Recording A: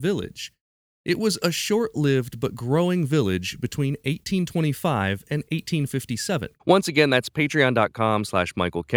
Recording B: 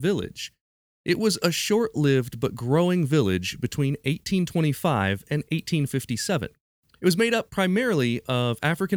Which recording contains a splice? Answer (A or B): A